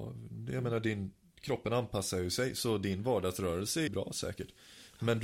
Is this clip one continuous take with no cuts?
no; 1 cut; at 3.9 s

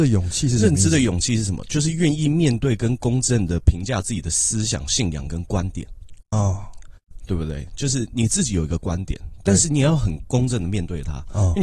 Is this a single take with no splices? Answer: yes; 0 cuts

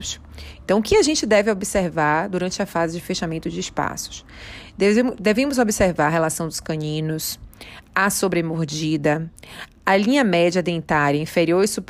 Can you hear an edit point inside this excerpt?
no; 0 cuts

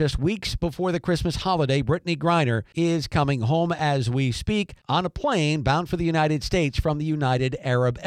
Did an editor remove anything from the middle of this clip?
no; 0 cuts

